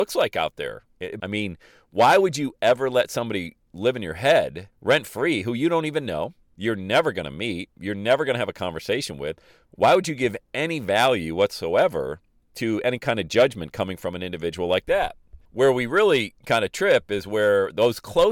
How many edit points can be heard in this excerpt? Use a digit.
3